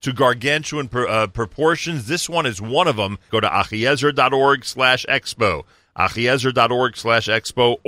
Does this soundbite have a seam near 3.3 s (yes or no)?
yes